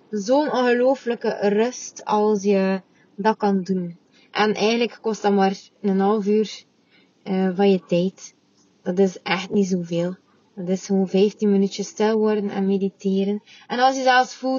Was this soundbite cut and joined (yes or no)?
no